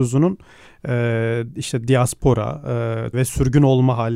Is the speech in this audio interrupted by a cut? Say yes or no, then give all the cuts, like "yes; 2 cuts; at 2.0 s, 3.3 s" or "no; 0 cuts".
yes; 1 cut; at 3.1 s